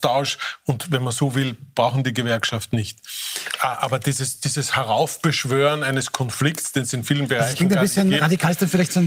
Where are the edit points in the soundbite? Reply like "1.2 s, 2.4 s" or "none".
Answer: none